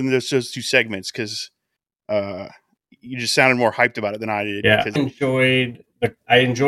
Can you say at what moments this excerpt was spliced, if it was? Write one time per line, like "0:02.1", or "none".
0:05.0